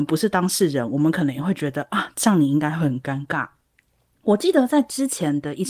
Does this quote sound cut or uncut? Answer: uncut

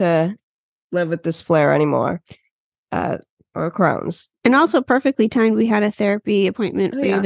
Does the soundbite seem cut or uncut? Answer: uncut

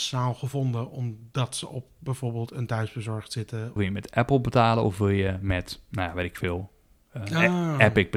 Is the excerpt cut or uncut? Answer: cut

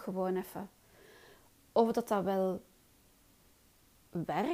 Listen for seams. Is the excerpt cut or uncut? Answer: uncut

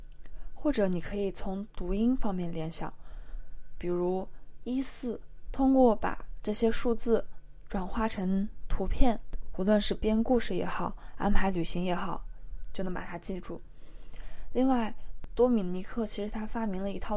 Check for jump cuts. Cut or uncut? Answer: cut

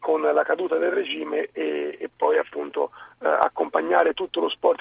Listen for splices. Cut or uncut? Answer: uncut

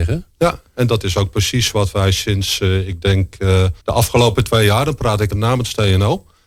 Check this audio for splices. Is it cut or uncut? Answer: cut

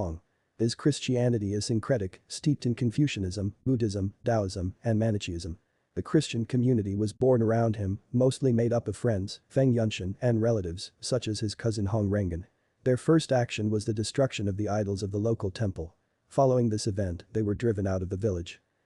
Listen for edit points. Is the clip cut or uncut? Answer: uncut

